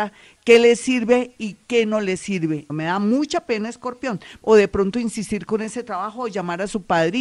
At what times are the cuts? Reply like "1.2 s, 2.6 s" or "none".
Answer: 2.7 s, 4.4 s